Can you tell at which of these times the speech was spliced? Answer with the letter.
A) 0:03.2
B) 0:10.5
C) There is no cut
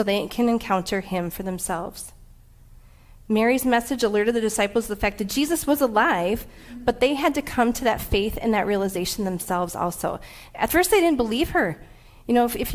C